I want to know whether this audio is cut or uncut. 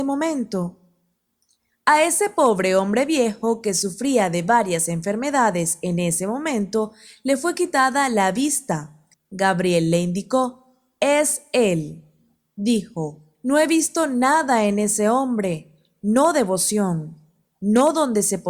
cut